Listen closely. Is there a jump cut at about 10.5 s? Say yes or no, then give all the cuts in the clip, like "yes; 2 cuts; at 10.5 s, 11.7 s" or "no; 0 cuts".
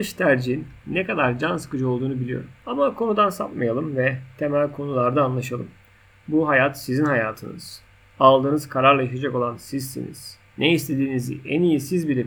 yes; 1 cut; at 10.5 s